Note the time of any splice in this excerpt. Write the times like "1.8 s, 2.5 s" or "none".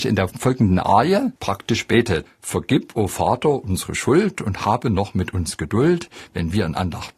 2.3 s